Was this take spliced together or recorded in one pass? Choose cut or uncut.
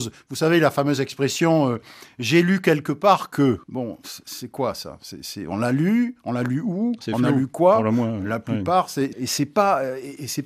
cut